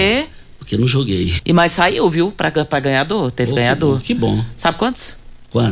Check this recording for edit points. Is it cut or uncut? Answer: cut